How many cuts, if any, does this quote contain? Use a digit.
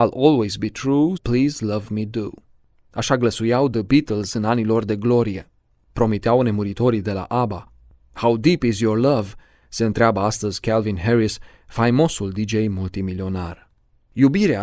2